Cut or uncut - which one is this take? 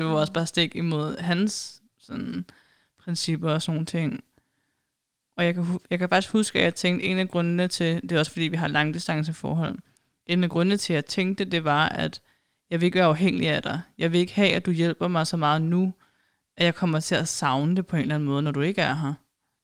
uncut